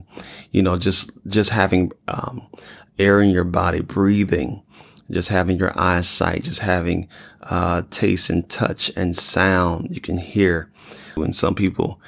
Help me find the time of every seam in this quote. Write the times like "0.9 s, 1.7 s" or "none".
11.2 s